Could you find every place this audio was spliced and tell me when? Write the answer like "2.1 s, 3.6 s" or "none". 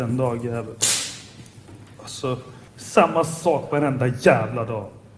2.7 s